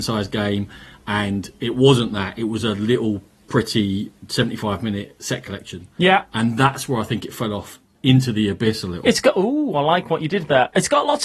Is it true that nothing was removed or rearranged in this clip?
yes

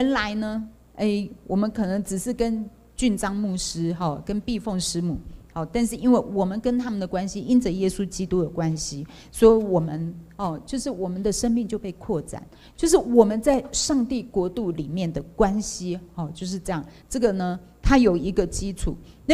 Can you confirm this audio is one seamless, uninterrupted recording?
yes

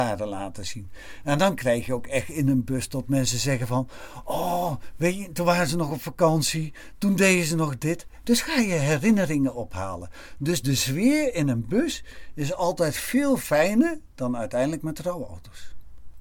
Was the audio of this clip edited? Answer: no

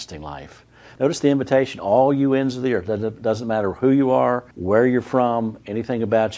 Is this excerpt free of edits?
no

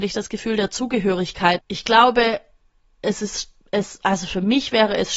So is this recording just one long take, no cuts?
no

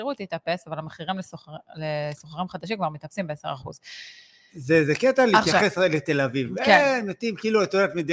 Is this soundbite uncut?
yes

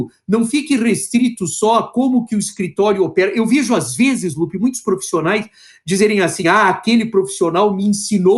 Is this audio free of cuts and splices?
yes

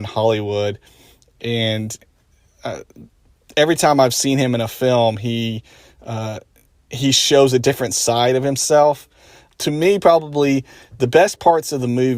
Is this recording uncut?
no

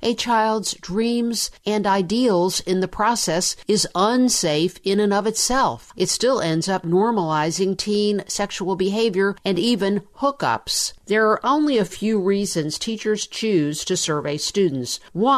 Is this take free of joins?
no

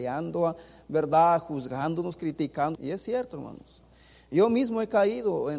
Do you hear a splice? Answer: yes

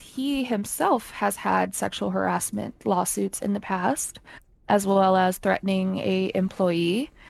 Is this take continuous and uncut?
yes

